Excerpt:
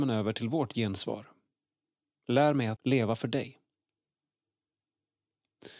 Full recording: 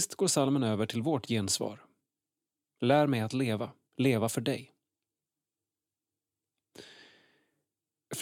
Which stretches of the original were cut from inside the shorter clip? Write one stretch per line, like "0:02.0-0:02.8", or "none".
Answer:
0:03.3-0:03.9